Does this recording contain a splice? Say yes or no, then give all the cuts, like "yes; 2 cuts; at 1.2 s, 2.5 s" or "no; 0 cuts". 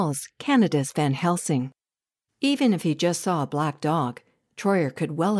no; 0 cuts